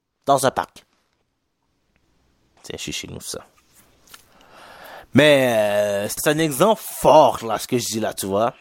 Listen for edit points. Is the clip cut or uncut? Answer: cut